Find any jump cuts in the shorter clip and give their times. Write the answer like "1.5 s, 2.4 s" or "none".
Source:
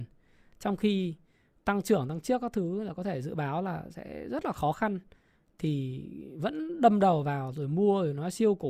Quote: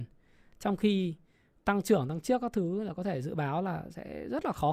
none